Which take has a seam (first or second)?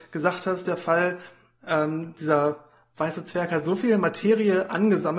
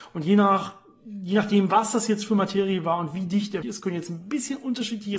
second